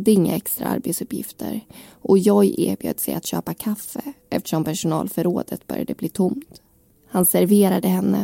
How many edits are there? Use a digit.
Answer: 1